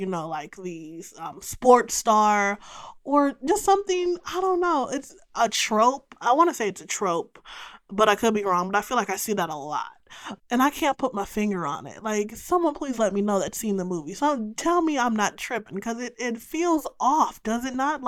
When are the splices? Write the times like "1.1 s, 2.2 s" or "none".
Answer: 10.4 s